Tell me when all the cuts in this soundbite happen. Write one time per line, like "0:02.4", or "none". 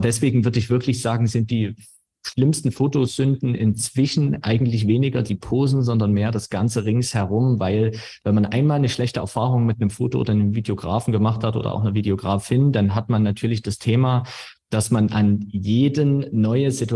none